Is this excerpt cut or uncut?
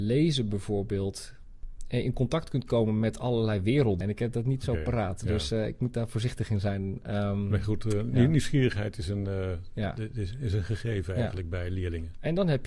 cut